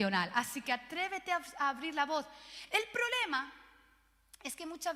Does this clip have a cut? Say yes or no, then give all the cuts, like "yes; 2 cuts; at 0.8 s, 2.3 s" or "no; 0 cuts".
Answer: no; 0 cuts